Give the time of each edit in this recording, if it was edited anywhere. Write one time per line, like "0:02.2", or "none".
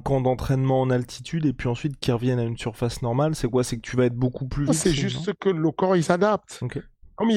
0:04.7